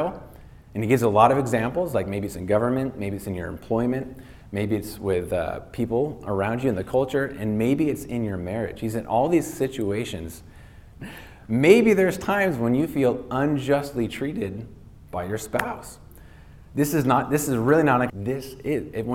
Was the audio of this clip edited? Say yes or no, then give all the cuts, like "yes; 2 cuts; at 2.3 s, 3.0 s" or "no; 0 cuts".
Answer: yes; 2 cuts; at 11.0 s, 18.1 s